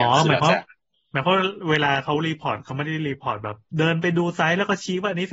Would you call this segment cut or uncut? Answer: cut